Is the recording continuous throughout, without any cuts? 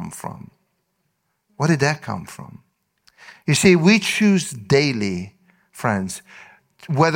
yes; 0 cuts

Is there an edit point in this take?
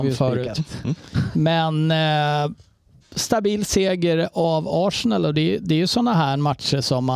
no; 0 cuts

